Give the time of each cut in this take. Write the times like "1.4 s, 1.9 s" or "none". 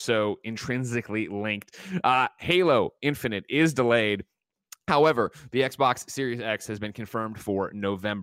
none

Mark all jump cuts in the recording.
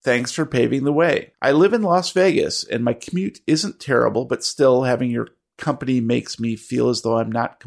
1.3 s

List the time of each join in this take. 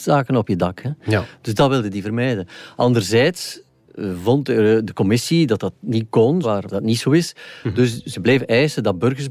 6.4 s

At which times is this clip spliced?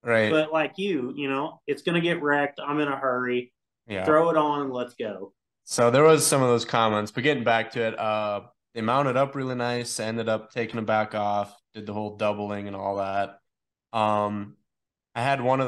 5.5 s

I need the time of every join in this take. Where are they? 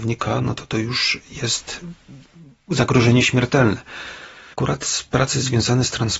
4.5 s

